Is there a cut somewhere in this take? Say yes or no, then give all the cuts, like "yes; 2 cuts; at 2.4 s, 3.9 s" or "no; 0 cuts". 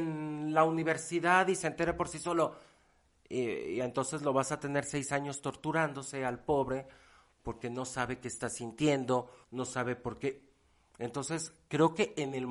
yes; 1 cut; at 9.4 s